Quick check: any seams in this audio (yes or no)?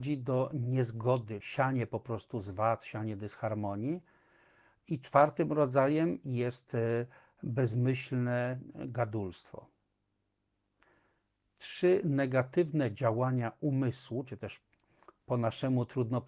yes